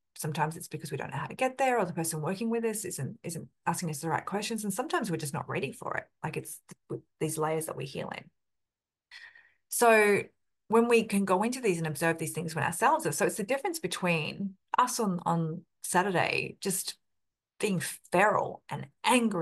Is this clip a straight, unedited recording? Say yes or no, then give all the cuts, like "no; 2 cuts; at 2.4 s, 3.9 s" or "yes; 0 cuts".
yes; 0 cuts